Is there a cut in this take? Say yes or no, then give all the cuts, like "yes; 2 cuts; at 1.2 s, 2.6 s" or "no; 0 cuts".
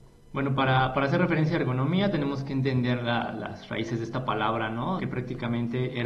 yes; 1 cut; at 5.0 s